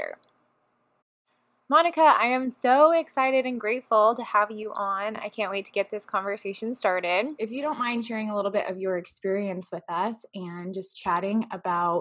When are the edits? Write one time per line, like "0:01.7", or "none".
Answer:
none